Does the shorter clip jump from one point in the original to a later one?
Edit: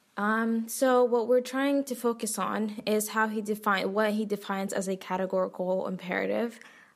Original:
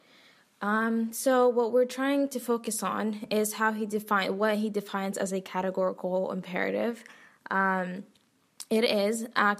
no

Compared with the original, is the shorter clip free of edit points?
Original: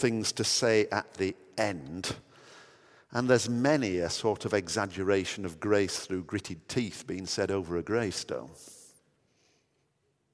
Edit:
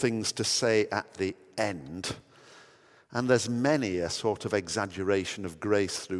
yes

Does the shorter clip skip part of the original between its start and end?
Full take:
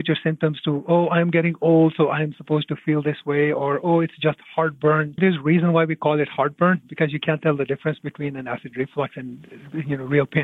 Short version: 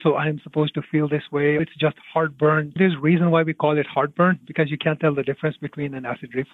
yes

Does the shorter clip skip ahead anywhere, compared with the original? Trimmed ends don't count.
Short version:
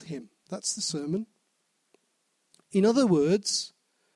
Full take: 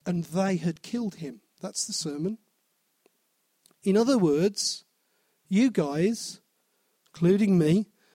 no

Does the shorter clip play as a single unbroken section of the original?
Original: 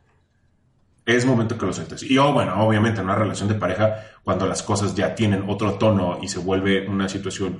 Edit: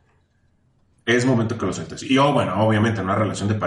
yes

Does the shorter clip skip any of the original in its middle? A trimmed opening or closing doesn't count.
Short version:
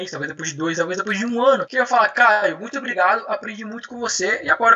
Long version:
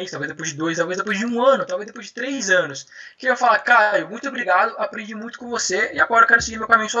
yes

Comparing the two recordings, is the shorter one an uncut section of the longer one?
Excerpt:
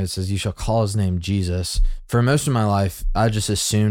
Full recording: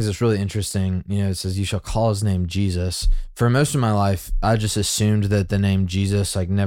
yes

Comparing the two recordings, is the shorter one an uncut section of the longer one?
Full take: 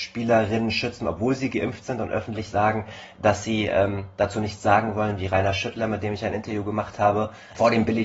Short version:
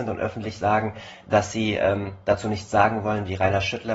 yes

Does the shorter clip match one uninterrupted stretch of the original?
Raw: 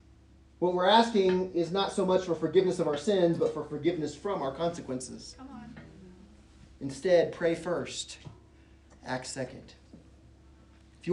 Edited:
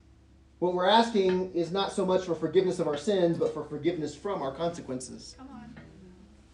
yes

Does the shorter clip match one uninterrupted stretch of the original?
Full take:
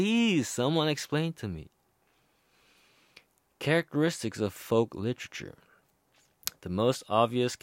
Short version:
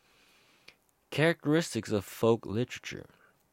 yes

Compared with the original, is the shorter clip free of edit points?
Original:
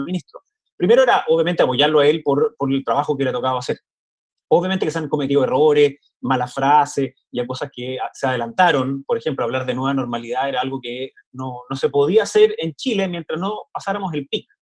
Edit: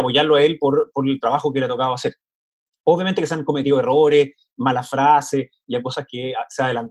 yes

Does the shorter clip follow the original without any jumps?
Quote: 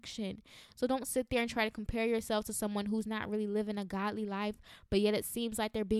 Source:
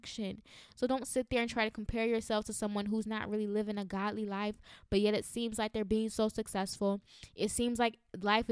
yes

